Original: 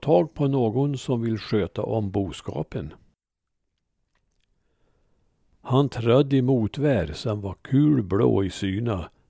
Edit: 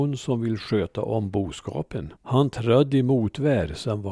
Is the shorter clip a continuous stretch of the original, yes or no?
no